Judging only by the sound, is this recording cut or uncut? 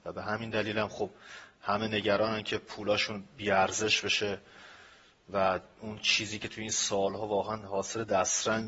uncut